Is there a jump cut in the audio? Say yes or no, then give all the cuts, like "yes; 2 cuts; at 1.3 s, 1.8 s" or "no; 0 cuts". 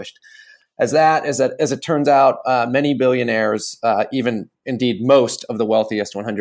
no; 0 cuts